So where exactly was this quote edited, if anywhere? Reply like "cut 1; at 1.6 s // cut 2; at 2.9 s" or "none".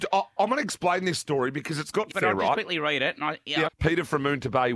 cut 1; at 2.1 s // cut 2; at 3.7 s